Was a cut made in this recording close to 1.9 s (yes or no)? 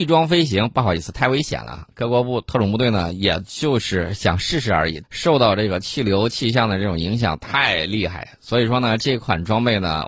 no